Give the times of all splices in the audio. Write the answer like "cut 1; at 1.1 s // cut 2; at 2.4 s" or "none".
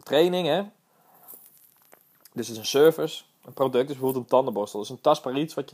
none